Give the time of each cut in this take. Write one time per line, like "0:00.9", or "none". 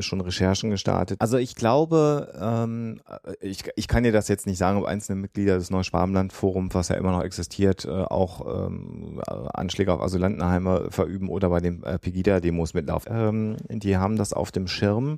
0:01.2
0:13.0